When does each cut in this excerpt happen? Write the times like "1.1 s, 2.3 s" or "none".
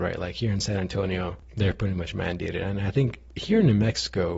3.3 s